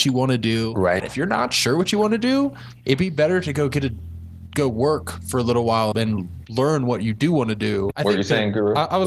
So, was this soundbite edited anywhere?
yes; 3 cuts; at 1.0 s, 5.9 s, 7.9 s

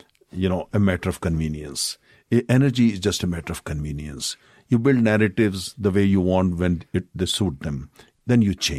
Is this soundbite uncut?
yes; 0 cuts

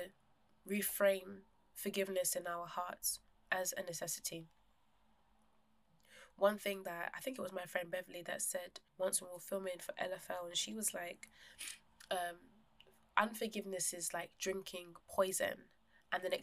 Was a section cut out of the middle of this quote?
yes; 1 cut; at 8.9 s

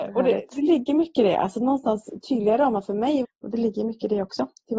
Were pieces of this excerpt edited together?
yes; 1 cut; at 3.2 s

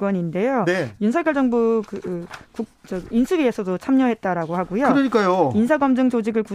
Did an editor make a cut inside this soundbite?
no; 0 cuts

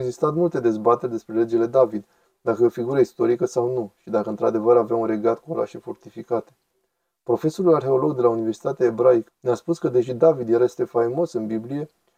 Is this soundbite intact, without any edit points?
no; 1 cut; at 9.3 s

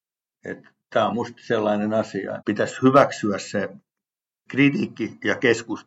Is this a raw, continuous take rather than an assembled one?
no; 2 cuts; at 2.4 s, 4.5 s

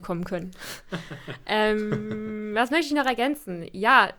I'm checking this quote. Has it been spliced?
no; 0 cuts

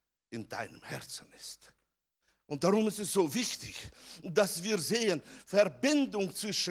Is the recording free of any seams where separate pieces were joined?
yes; 0 cuts

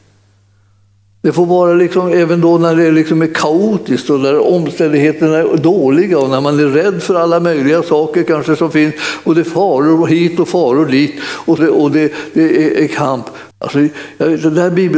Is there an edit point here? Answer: yes; 2 cuts; at 11.6 s, 13.5 s

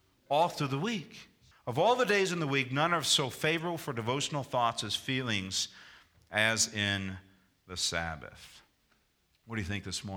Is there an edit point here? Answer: yes; 1 cut; at 1.5 s

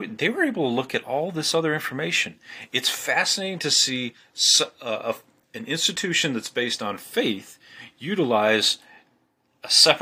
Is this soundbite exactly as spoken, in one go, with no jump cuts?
yes; 0 cuts

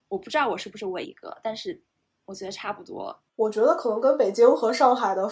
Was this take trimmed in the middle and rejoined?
yes; 2 cuts; at 1.0 s, 3.3 s

